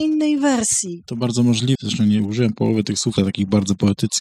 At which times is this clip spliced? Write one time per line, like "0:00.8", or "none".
0:01.8
0:03.2

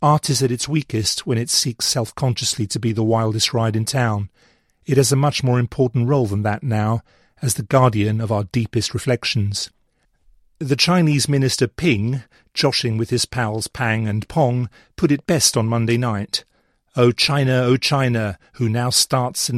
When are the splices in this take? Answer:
none

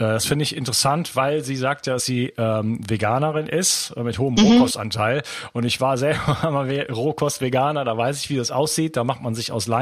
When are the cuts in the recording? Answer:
none

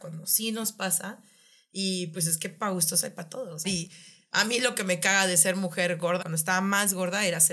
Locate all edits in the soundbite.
0:03.6
0:06.2

